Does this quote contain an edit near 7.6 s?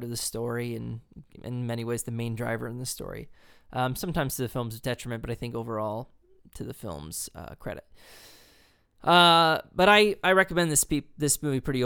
no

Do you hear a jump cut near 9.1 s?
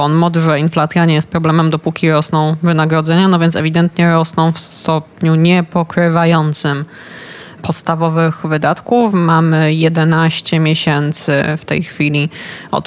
no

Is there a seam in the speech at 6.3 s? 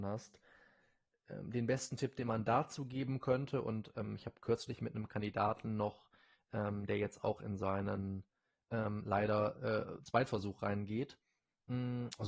no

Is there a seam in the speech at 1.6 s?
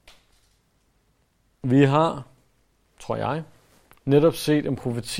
yes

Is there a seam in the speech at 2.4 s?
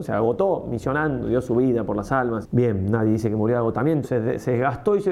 yes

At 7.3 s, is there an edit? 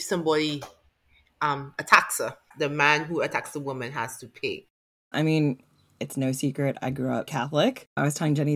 yes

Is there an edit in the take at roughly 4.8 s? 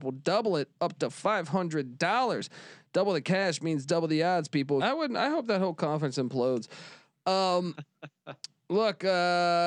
yes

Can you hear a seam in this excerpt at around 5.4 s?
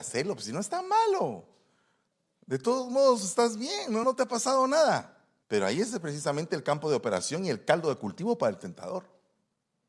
yes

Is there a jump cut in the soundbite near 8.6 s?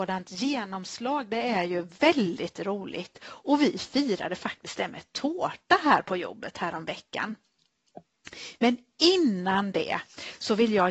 yes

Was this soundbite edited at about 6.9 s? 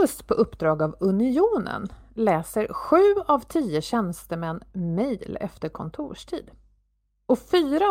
no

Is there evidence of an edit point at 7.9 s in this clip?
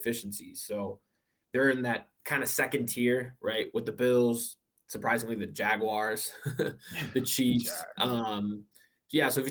no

